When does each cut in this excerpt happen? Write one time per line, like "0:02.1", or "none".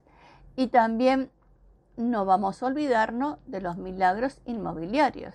none